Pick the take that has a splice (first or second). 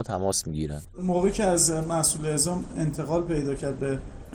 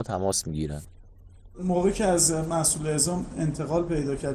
first